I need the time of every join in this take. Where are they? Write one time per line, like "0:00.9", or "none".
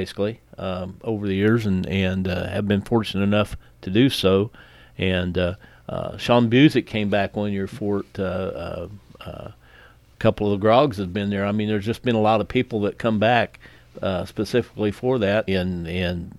0:15.5

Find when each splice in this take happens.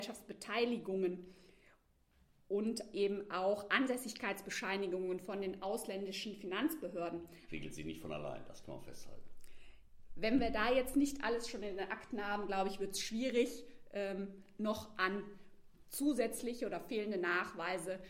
0:07.5
0:10.1

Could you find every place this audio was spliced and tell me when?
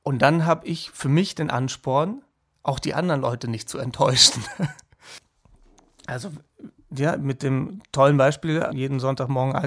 0:08.7

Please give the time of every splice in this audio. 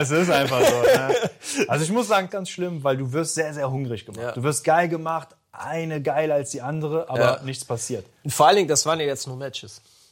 0:02.3

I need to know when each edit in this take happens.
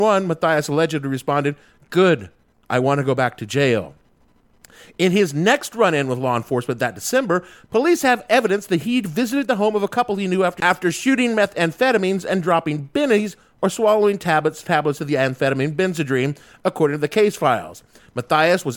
none

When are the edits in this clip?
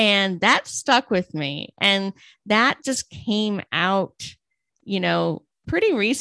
none

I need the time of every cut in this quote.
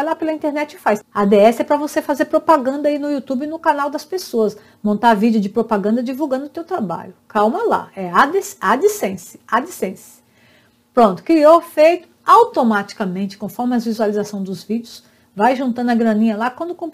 0:01.0

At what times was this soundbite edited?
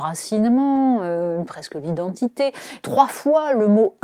0:02.8

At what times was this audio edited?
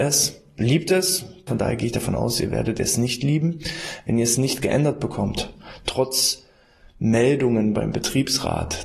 0:01.5

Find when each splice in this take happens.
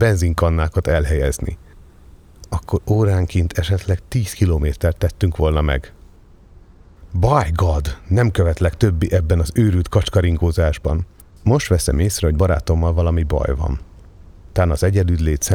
0:11.3

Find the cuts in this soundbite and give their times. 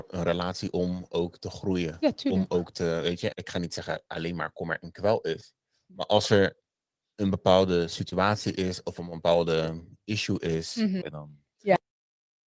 0:03.3
0:11.0

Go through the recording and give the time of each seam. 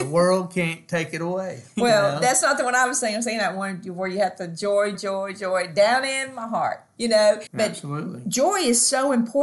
0:04.9
0:07.5

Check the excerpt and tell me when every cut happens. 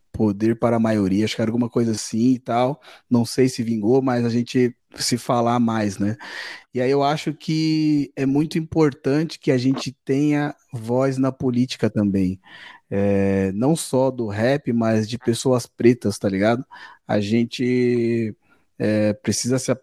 none

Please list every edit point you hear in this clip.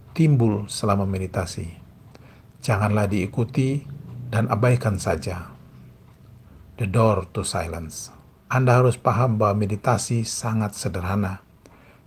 0:08.4

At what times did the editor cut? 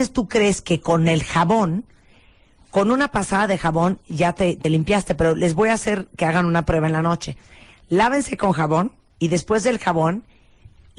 none

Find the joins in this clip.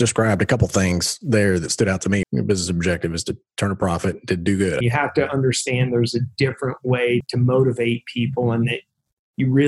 0:02.2
0:04.8
0:07.2

